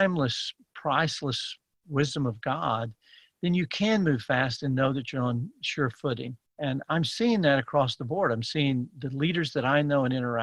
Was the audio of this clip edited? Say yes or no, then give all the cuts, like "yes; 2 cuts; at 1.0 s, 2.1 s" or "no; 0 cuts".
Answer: yes; 1 cut; at 6.5 s